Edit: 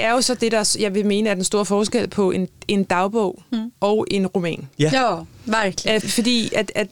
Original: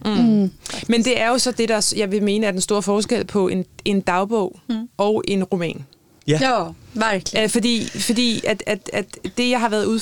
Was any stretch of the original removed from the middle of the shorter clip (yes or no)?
yes